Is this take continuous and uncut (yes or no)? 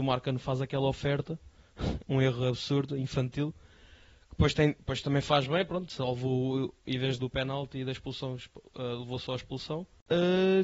no